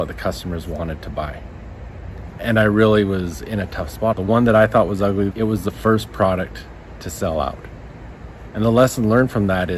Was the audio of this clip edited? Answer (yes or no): yes